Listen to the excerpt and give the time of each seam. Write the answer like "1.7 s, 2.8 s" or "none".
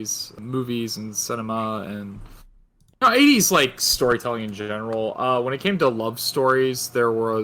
none